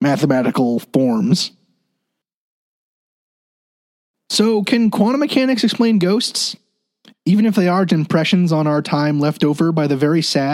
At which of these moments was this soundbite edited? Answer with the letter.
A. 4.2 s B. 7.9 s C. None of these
B